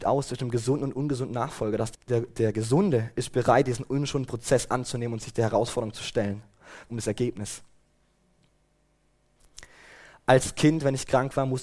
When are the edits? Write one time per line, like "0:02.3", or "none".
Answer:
0:01.9
0:06.9